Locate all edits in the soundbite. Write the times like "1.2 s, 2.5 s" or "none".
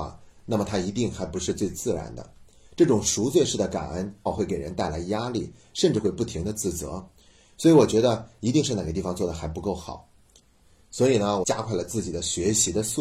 4.3 s, 11.4 s